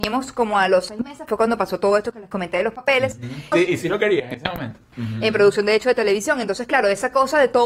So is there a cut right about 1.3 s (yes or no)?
no